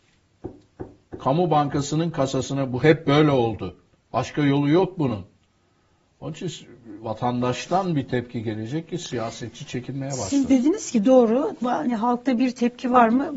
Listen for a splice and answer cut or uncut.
uncut